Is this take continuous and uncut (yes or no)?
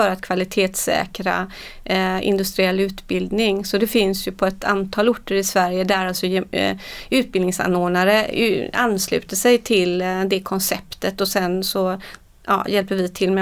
yes